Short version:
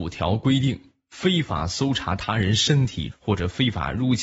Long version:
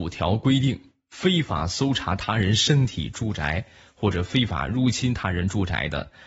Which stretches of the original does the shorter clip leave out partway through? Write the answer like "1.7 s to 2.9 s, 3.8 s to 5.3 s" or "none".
3.1 s to 3.9 s